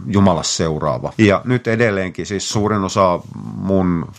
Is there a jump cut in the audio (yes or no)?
yes